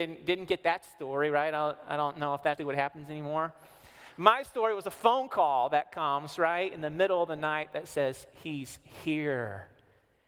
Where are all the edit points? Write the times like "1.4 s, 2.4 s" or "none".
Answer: 2.6 s